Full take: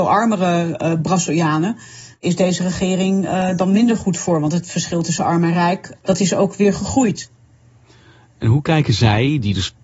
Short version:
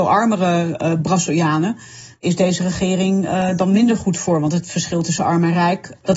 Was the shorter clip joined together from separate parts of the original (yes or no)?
no